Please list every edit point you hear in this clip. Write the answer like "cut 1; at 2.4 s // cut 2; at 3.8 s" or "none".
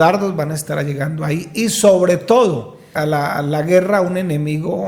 cut 1; at 3.0 s